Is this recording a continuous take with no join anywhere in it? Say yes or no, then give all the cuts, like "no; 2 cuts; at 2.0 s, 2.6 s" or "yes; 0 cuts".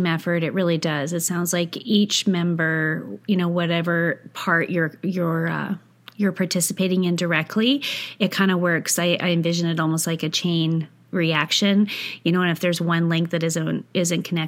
yes; 0 cuts